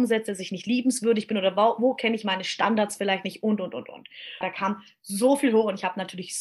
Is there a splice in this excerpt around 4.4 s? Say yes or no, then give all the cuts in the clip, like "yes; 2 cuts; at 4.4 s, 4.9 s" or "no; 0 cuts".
yes; 1 cut; at 4.4 s